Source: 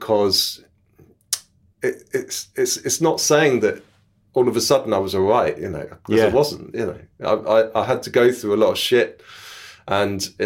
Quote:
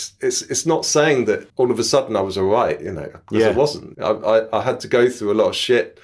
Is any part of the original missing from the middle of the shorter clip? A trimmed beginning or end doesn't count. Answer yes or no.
yes